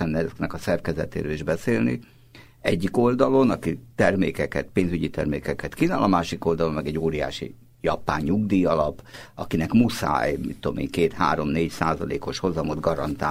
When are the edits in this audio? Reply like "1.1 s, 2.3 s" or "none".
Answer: none